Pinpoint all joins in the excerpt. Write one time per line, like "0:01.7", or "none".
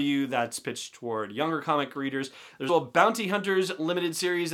0:02.7